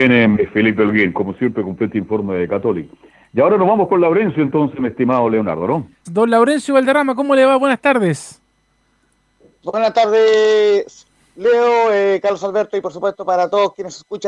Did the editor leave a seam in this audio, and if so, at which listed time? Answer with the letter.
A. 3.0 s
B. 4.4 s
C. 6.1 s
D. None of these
C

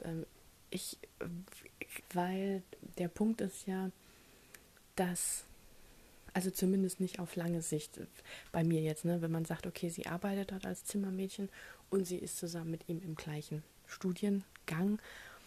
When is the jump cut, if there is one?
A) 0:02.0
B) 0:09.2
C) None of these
A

